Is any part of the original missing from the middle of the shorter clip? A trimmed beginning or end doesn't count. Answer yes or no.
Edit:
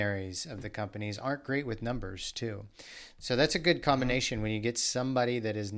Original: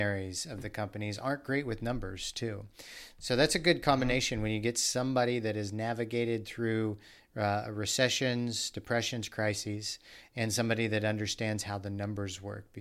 no